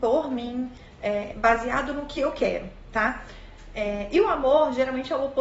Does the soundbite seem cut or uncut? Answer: cut